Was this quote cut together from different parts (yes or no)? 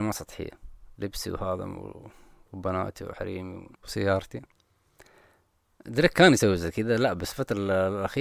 yes